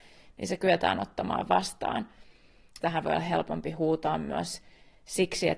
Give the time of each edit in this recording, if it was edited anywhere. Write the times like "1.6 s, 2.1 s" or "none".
2.8 s